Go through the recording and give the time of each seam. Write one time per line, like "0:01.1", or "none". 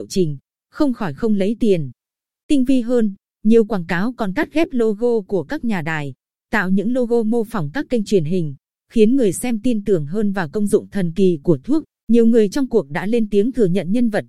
0:12.0